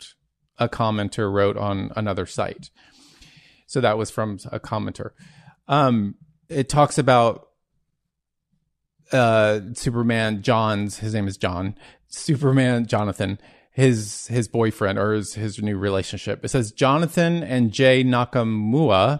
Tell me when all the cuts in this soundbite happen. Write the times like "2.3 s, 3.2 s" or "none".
6.5 s